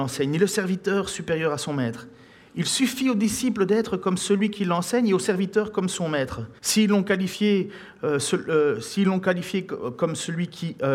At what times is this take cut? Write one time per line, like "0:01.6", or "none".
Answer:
0:06.6